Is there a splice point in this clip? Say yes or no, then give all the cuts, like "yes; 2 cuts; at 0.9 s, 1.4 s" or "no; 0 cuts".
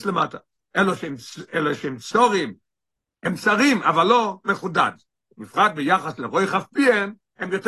no; 0 cuts